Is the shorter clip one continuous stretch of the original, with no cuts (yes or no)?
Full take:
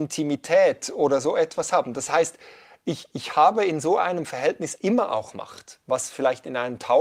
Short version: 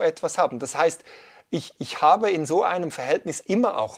yes